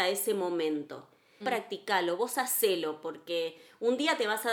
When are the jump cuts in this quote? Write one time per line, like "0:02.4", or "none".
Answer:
0:01.4